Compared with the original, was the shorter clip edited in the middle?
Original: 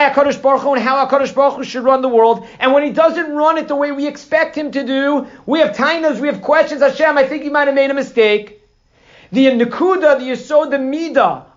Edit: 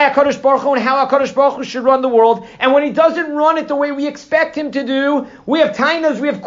no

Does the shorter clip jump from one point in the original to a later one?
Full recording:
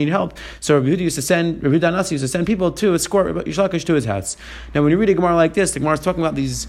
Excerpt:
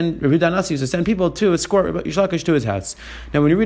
no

